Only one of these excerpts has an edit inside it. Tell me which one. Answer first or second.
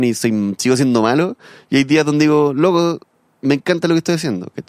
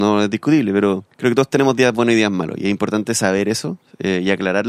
second